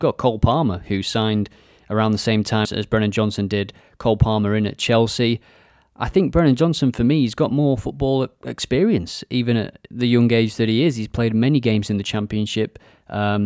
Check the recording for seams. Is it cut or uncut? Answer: cut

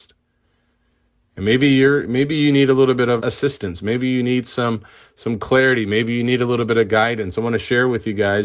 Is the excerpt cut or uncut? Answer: cut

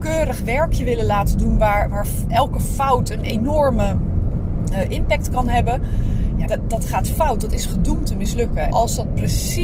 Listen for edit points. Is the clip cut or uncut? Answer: cut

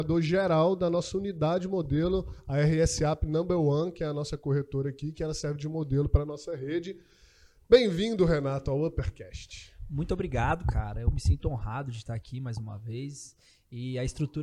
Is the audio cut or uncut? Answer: uncut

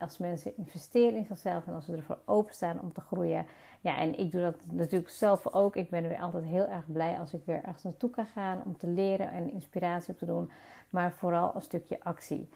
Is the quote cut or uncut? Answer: uncut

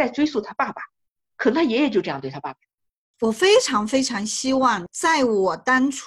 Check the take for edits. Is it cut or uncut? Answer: cut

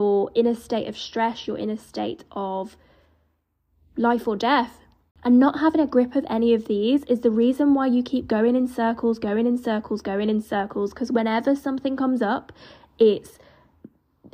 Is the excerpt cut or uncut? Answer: uncut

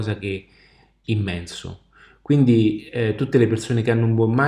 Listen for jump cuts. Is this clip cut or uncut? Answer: cut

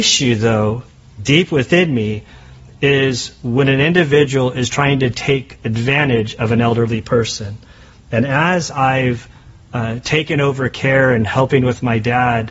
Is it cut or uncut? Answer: uncut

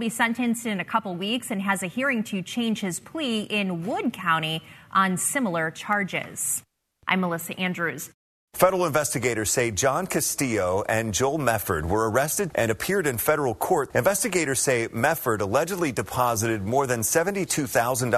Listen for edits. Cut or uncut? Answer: cut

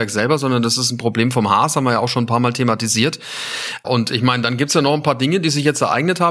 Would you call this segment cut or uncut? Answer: cut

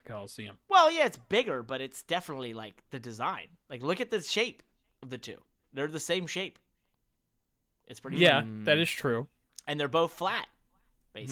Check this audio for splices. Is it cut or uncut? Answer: uncut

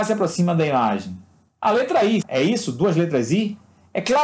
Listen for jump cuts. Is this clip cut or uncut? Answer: cut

